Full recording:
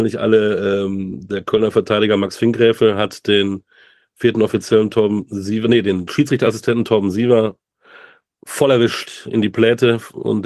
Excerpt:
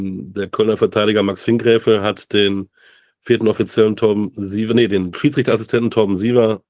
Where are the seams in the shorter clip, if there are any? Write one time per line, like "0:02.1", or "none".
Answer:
none